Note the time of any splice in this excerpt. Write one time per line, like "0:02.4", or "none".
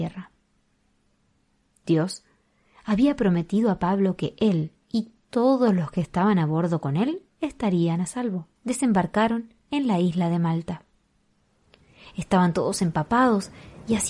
0:04.8
0:08.6

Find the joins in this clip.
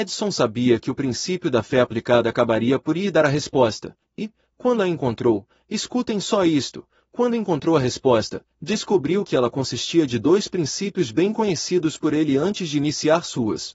none

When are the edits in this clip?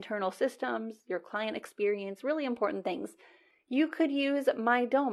none

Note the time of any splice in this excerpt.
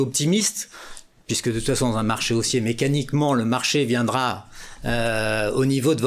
none

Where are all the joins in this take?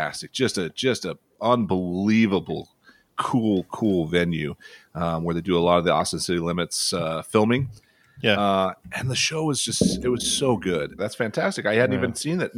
0:11.0

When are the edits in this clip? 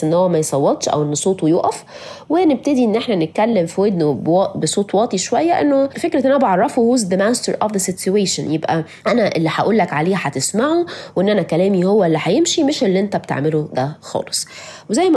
0:05.9
0:09.0

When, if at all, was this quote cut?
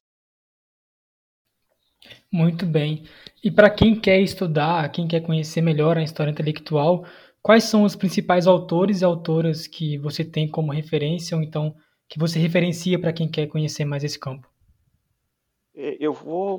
none

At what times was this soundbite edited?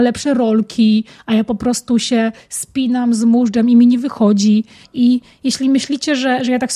0:04.8

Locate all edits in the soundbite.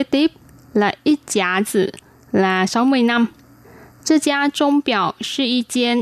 none

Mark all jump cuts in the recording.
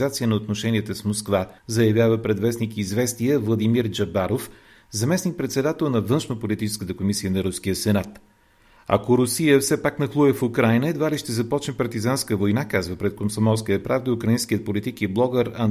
0:01.6

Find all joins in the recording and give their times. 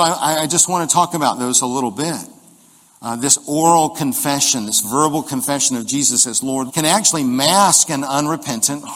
0:02.9
0:06.7

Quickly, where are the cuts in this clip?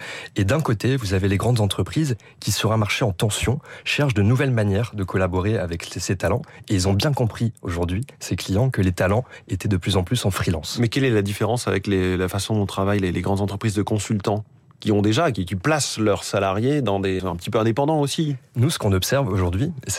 0:17.2

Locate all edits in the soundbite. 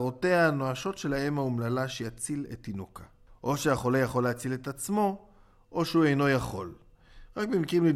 0:03.3

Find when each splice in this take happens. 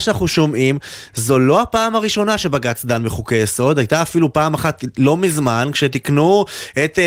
none

